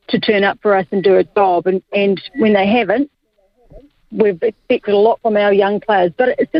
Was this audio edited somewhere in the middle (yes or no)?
no